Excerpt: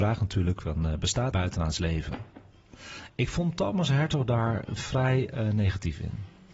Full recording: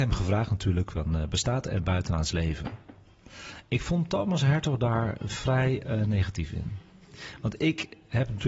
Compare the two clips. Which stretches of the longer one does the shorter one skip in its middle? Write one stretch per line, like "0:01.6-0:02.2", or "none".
0:01.6-0:01.8